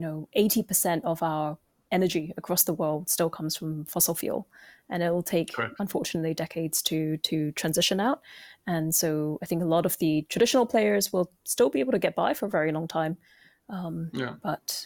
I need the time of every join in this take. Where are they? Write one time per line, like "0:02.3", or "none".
none

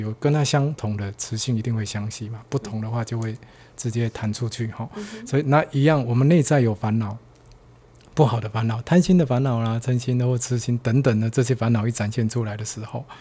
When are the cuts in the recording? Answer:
none

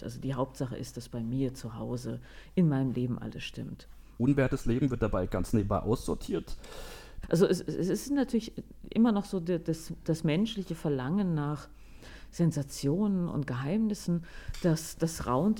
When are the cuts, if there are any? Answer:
0:04.2
0:07.2

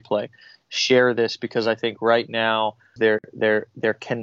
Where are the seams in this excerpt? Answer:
0:03.0

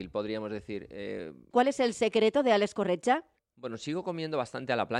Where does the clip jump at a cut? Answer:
0:01.5

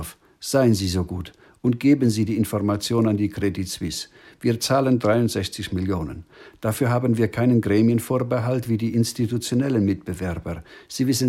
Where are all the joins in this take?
none

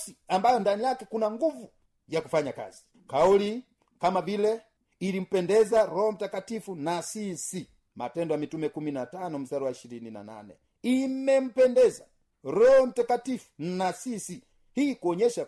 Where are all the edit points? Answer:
none

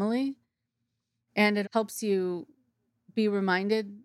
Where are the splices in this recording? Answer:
0:01.6

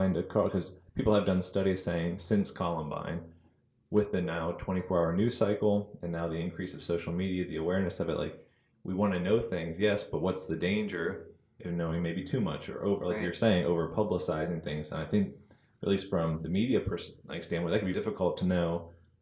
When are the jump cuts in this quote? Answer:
0:17.9

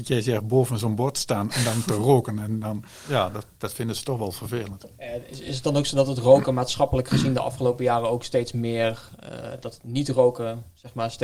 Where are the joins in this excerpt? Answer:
none

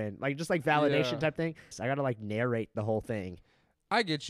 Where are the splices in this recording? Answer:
0:01.7

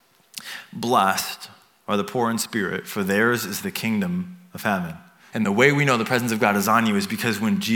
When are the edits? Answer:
0:05.3

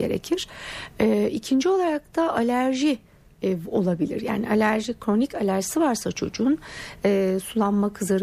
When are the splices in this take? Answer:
none

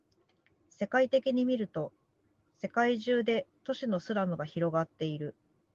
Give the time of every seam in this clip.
none

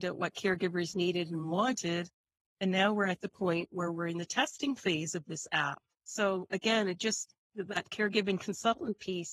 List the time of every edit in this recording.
0:06.0
0:07.4

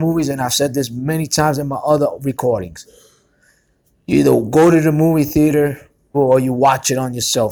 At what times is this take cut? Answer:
0:06.1

